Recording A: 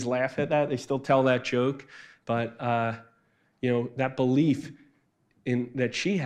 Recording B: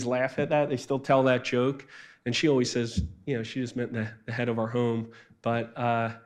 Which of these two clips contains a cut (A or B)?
A